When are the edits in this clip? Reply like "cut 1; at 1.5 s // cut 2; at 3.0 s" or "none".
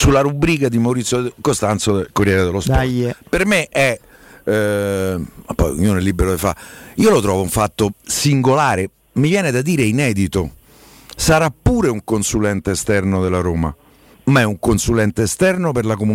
none